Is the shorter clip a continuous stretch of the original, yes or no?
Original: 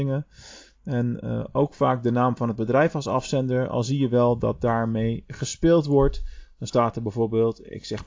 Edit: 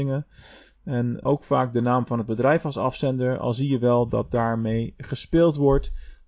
no